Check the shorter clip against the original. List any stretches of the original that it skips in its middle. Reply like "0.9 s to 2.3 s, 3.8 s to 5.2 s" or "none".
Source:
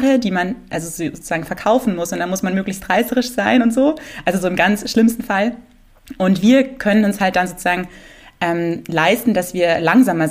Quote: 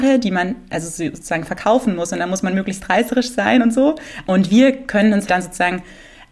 4.2 s to 6.1 s, 7.2 s to 7.3 s